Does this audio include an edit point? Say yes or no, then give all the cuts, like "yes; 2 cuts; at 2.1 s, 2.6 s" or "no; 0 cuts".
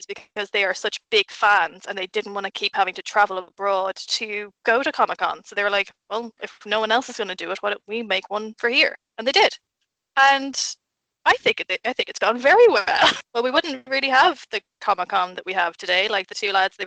yes; 1 cut; at 13.2 s